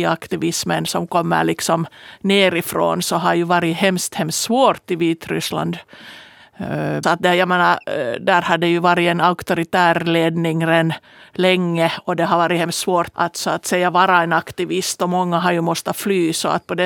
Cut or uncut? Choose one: cut